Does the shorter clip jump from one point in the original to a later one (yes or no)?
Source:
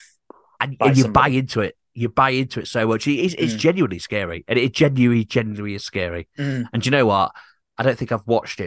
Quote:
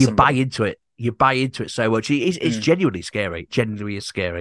yes